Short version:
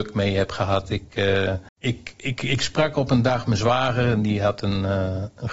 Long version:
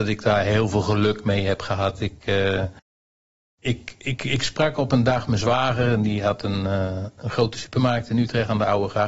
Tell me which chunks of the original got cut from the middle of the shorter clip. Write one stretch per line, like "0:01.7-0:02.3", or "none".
0:02.8-0:03.5